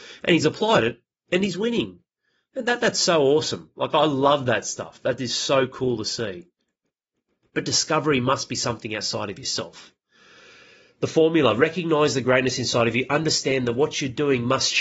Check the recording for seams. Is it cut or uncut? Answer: uncut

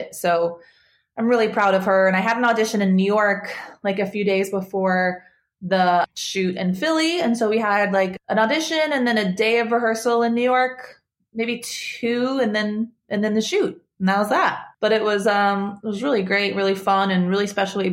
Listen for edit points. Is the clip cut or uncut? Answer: cut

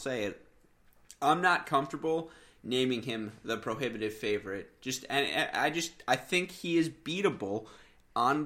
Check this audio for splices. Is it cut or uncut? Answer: uncut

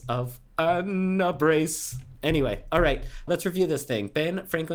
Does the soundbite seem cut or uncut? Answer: cut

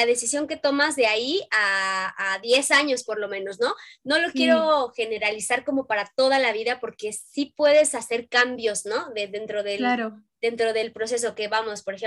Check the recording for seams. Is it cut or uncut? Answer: uncut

